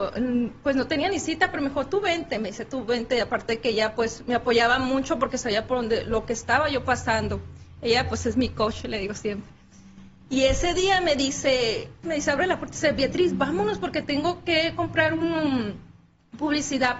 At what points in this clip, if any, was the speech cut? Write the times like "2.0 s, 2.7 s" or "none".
12.0 s